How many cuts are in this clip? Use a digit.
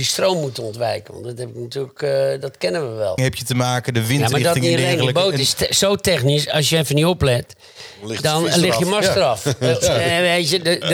1